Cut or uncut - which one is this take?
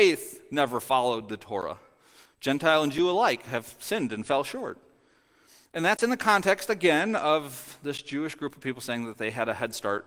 cut